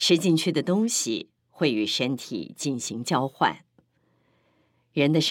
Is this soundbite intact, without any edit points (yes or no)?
yes